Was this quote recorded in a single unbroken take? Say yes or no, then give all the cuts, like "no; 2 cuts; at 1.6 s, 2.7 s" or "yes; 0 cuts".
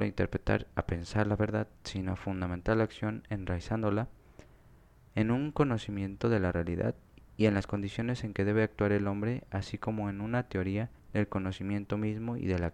no; 1 cut; at 11.0 s